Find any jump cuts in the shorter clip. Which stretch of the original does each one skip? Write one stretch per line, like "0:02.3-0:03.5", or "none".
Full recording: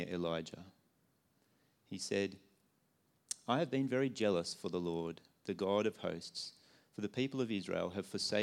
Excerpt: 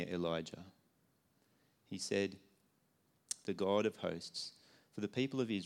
0:03.4-0:05.4